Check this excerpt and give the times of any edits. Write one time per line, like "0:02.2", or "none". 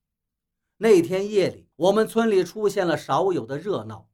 0:01.7